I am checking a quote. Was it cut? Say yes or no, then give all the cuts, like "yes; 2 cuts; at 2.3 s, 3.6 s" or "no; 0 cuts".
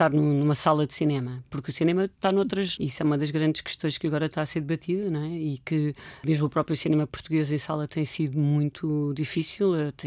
yes; 2 cuts; at 2.8 s, 6.2 s